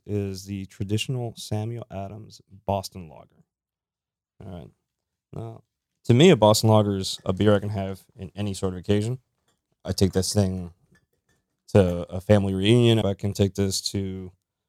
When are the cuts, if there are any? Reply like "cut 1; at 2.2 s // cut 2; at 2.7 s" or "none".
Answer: cut 1; at 13.0 s